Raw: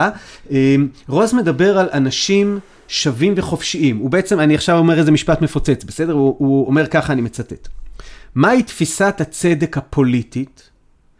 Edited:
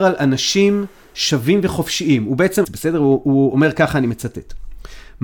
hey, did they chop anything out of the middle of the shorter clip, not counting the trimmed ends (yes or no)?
yes